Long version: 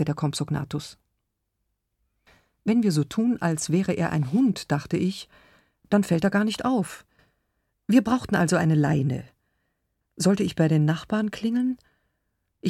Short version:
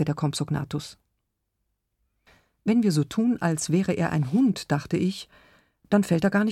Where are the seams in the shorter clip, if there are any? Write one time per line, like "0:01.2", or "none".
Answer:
none